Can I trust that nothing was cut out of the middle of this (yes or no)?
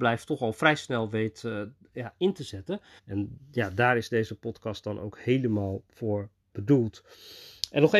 no